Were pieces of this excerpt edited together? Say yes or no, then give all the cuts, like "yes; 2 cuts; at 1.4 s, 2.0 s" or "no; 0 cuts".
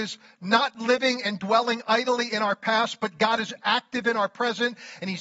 no; 0 cuts